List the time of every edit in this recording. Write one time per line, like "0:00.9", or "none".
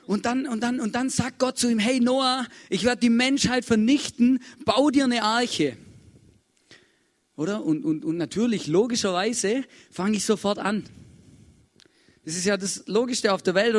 none